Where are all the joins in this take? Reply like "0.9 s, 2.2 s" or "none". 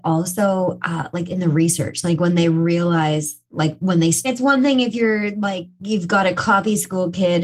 4.2 s